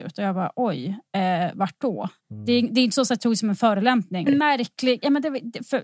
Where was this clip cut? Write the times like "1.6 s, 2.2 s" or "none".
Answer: 2.2 s, 4.3 s